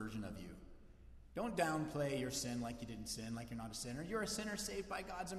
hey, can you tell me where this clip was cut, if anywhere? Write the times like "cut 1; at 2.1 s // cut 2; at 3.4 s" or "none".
none